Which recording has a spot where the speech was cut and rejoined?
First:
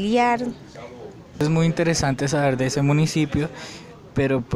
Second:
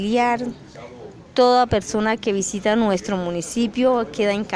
first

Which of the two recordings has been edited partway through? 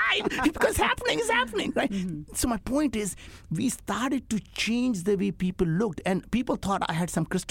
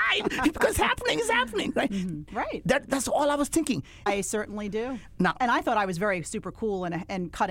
second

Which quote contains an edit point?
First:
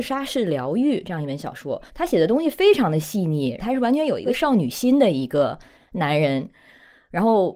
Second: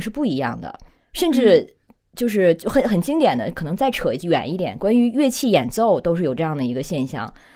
first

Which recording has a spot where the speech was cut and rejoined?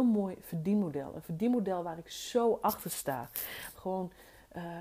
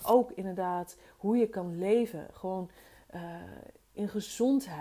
first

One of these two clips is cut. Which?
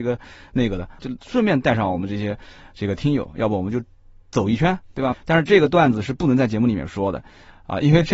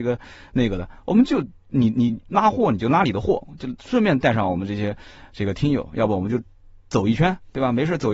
first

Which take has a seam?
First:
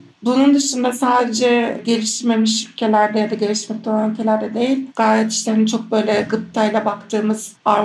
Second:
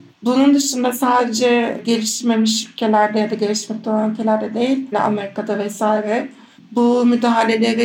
second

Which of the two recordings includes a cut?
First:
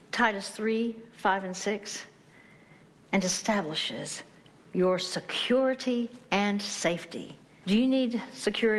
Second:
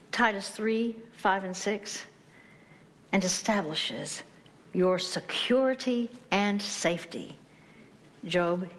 first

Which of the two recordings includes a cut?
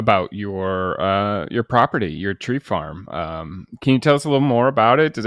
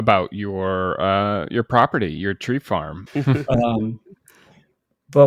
second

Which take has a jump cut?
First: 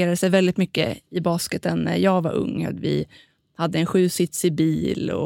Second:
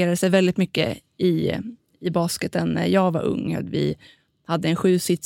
first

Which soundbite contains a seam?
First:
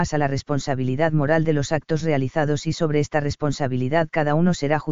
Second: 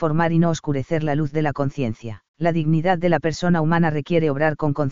second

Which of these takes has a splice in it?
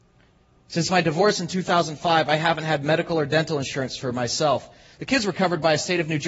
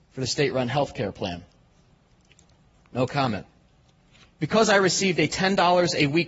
second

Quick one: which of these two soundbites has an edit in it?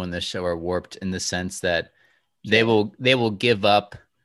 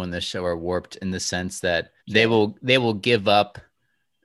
second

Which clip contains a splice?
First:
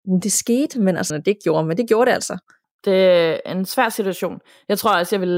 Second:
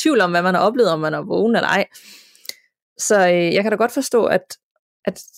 first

